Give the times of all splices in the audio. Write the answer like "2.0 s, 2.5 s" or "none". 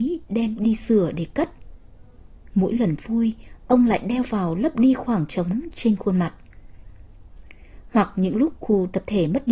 none